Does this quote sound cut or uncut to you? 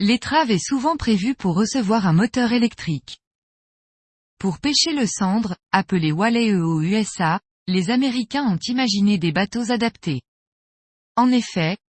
uncut